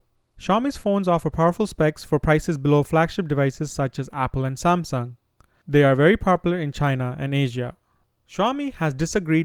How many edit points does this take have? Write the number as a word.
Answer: zero